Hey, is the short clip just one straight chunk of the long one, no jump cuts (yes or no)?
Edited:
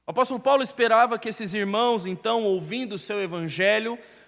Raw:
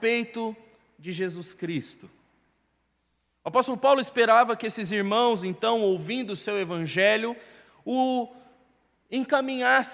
yes